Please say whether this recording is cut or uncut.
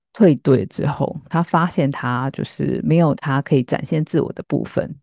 uncut